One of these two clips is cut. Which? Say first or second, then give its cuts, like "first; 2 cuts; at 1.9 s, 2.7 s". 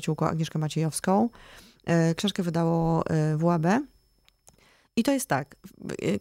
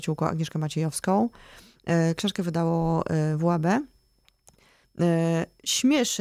second; 1 cut; at 4.8 s